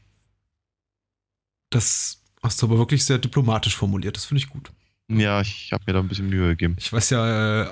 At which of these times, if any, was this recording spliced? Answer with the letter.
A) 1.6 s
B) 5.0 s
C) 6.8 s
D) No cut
D